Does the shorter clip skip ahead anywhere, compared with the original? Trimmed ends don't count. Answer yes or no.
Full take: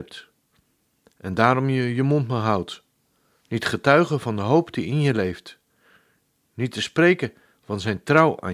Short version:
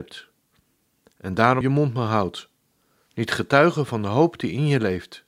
yes